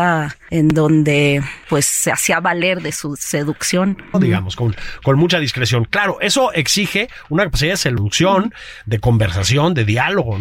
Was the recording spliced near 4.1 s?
yes; 1 cut; at 4.1 s

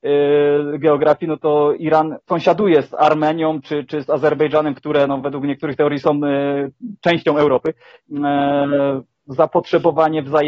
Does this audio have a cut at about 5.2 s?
no; 2 cuts; at 2.2 s, 8.0 s

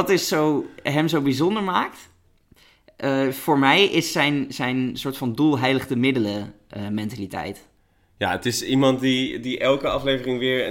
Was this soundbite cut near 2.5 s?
no; 0 cuts

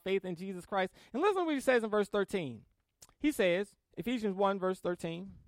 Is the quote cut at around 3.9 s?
yes; 1 cut; at 3.9 s

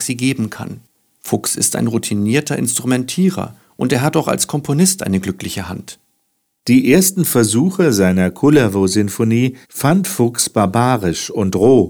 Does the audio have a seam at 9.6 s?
yes; 1 cut; at 9.6 s

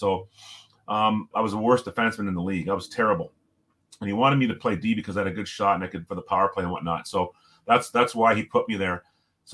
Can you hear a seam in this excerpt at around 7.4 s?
no; 2 cuts; at 1.3 s, 6.1 s

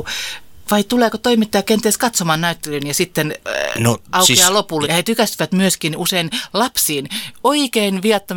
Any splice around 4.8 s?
yes; 1 cut; at 4.8 s

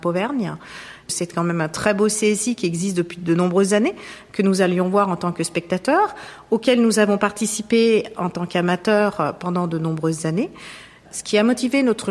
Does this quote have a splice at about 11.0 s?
yes; 1 cut; at 11.0 s

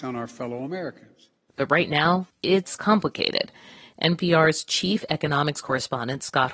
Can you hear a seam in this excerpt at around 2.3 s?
yes; 1 cut; at 2.3 s

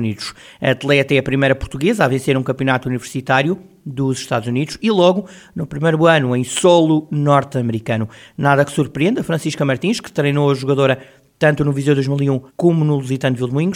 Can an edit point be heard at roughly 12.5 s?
yes; 1 cut; at 12.5 s

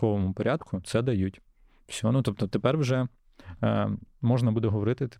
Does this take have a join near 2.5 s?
no; 0 cuts

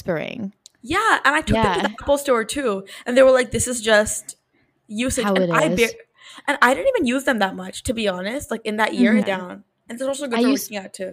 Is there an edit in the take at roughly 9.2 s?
yes; 1 cut; at 9.2 s

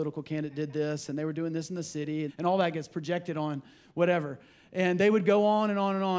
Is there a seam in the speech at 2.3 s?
yes; 1 cut; at 2.3 s

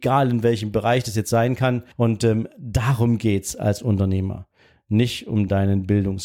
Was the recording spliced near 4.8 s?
no; 1 cut; at 1.9 s

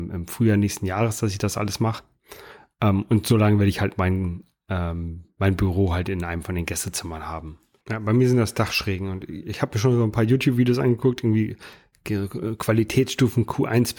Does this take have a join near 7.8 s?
yes; 1 cut; at 7.8 s

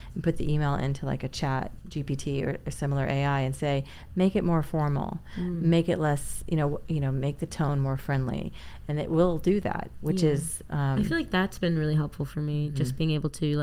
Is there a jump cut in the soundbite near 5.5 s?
no; 0 cuts

